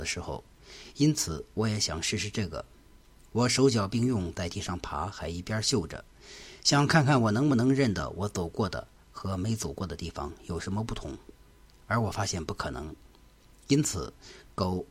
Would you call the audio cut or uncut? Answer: uncut